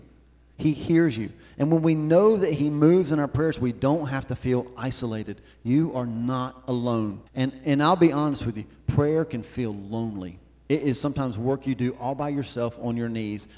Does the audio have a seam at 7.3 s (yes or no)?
yes